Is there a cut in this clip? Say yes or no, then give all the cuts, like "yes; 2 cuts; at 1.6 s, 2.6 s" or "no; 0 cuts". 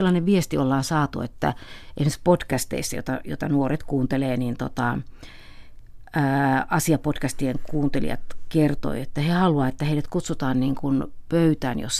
no; 0 cuts